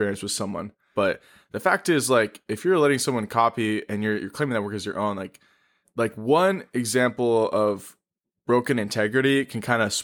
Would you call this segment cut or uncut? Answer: cut